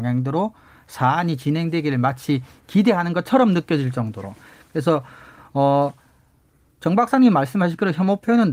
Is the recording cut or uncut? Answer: uncut